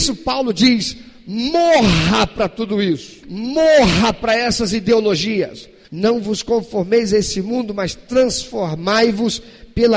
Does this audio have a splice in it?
yes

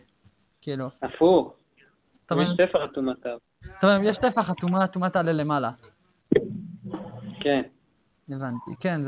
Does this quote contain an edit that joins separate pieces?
no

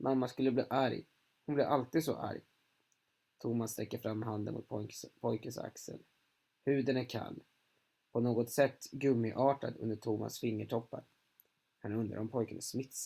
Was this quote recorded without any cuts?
yes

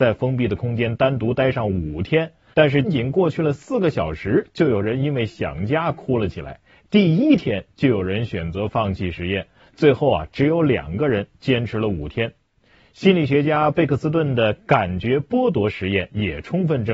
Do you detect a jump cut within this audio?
yes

